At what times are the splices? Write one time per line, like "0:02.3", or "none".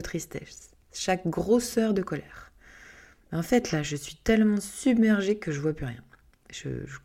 none